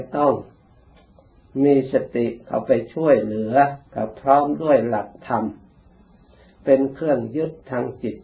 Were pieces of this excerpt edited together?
yes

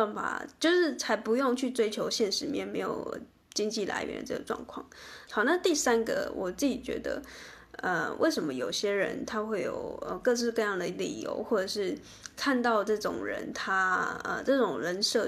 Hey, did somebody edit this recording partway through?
yes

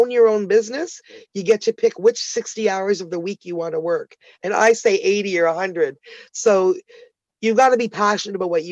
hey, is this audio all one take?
yes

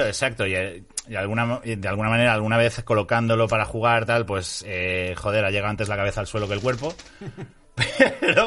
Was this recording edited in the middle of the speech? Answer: no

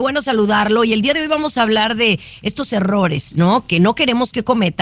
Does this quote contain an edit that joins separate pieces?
no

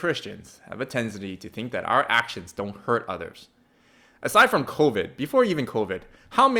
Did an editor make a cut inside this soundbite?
no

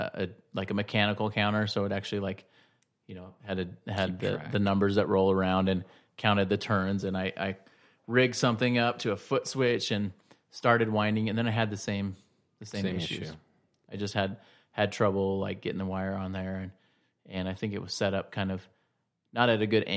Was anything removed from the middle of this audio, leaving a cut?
no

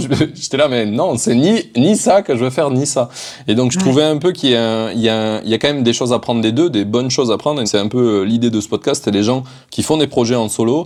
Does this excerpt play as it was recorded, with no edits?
no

